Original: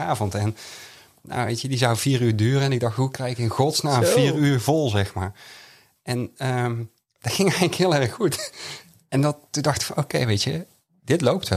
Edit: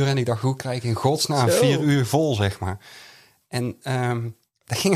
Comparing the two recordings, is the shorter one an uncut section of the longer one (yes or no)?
yes